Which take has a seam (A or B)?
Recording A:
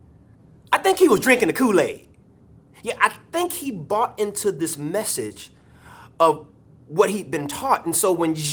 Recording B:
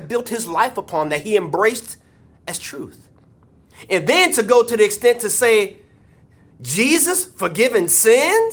B